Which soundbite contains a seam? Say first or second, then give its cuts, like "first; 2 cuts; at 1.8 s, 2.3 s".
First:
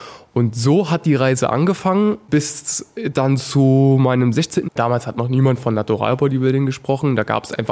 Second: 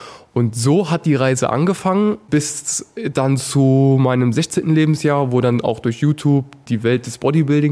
first; 1 cut; at 4.7 s